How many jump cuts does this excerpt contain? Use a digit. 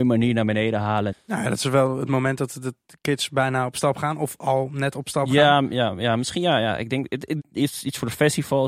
2